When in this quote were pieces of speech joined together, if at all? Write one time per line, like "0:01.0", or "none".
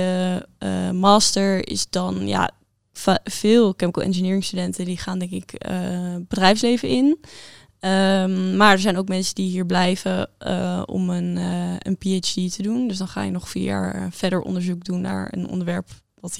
none